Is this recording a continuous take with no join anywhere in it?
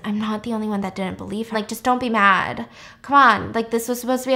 no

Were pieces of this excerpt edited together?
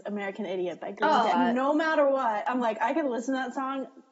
yes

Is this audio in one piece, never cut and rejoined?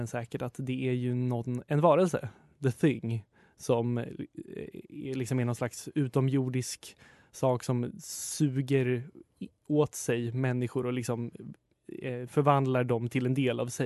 yes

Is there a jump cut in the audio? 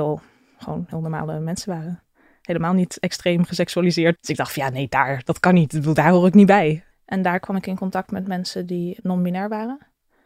yes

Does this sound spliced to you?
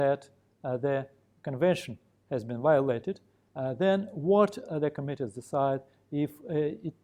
yes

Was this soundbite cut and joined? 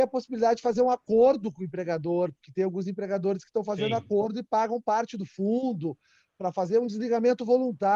no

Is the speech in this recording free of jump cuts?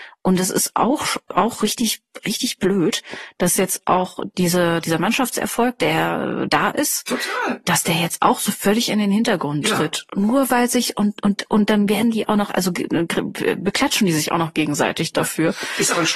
yes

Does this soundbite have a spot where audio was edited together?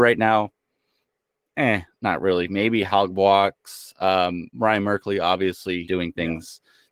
yes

